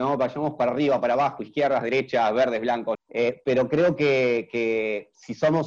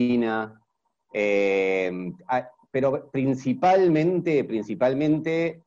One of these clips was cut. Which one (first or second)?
first